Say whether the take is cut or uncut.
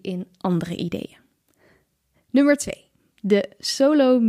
uncut